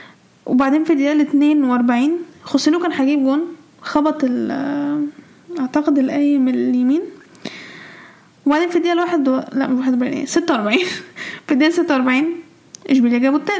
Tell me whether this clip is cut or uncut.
uncut